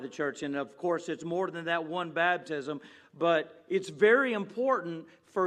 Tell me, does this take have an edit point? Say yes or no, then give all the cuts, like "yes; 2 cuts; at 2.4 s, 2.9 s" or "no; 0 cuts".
no; 0 cuts